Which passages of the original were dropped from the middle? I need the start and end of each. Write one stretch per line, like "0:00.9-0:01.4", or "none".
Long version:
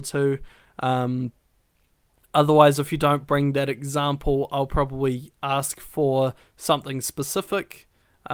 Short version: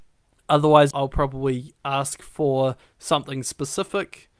0:02.8-0:04.5